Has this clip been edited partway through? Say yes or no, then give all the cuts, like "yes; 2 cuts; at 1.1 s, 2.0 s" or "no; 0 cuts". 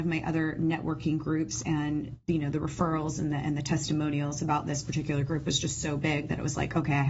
yes; 1 cut; at 2.2 s